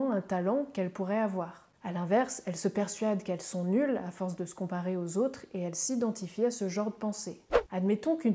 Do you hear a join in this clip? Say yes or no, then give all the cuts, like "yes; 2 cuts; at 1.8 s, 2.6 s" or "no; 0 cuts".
no; 0 cuts